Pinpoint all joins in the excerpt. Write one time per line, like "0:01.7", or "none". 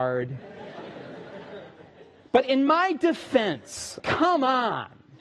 0:04.0